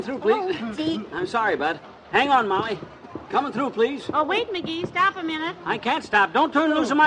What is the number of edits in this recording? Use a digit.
0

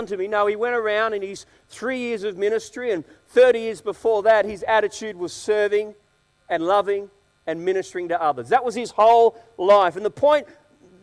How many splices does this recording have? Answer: 0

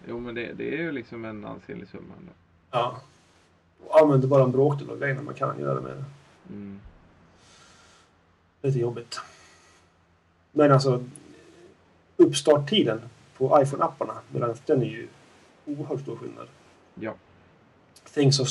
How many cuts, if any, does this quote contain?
1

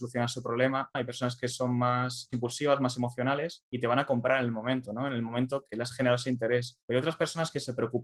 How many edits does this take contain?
1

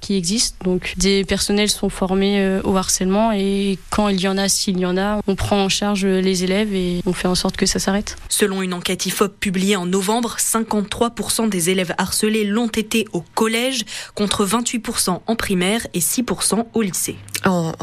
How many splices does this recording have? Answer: 1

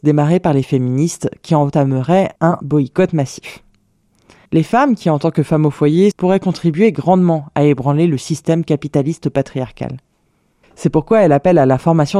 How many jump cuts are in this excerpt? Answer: 3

